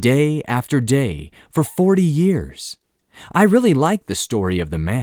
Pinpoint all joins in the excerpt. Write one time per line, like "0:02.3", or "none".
none